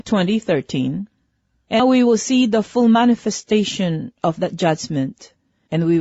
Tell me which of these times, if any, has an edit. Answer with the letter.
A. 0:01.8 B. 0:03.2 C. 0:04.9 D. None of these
A